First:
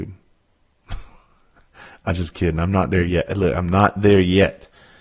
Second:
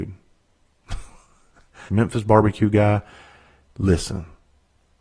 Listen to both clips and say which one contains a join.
second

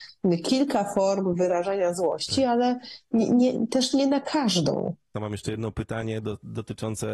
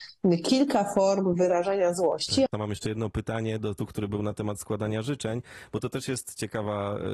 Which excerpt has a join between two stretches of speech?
second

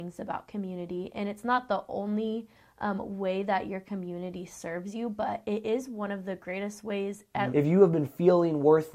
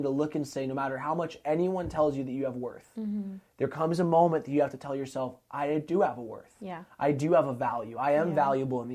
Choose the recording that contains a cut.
first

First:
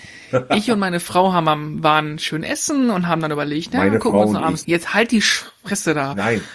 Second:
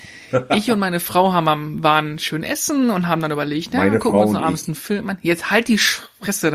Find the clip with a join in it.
first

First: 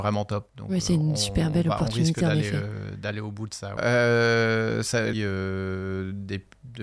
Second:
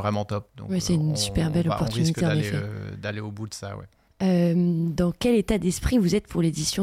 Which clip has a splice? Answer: first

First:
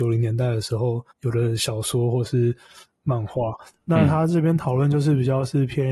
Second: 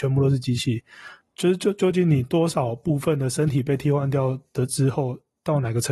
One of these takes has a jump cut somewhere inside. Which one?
first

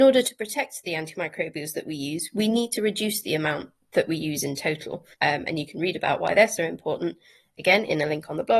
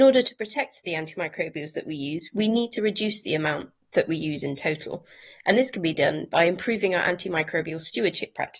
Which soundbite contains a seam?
first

